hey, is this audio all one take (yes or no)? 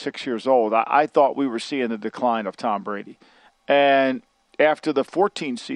yes